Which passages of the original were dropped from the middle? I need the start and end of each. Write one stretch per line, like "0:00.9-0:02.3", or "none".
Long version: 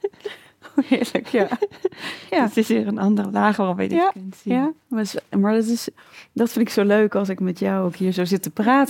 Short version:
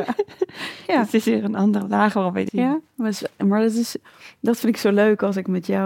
0:03.9-0:04.4